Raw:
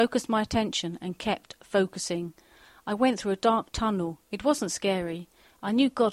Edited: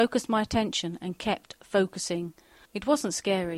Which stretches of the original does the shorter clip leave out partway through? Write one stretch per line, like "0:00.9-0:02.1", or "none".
0:02.7-0:04.2

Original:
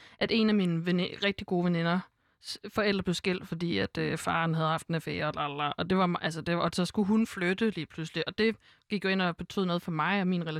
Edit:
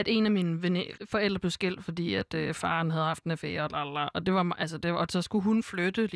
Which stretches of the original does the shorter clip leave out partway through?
0:01.2-0:02.6

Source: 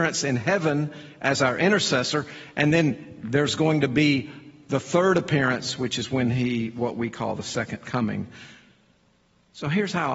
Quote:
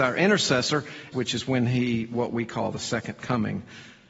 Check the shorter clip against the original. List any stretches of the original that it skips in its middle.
0:02.5-0:05.8

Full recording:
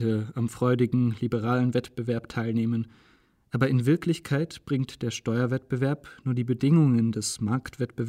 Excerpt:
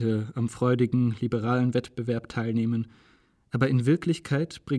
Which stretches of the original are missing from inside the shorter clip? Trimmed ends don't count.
none

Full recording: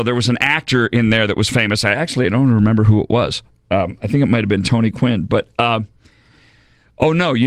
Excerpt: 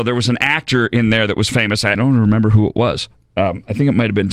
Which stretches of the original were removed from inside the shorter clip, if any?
0:01.9-0:02.3

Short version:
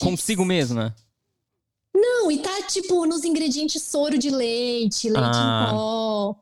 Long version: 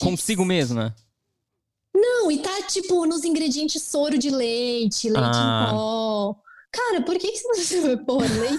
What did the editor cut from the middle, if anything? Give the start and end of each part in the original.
none

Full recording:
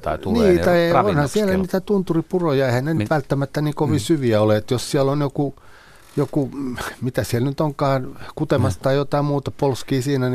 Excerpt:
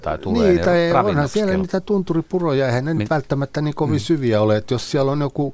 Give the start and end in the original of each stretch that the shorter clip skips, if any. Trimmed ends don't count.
none

